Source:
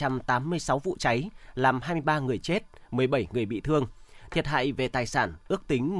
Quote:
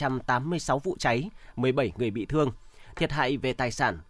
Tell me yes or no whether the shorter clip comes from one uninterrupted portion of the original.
no